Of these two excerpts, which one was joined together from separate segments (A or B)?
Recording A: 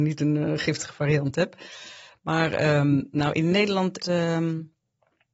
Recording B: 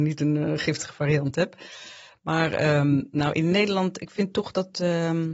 A